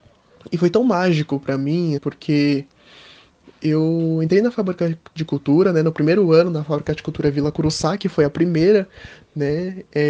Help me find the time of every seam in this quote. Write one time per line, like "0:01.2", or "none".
0:02.0